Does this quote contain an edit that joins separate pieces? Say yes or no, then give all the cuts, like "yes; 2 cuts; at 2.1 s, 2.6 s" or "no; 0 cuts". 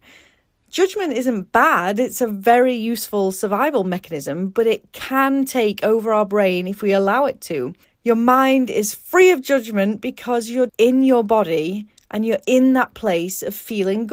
yes; 2 cuts; at 7.8 s, 10.7 s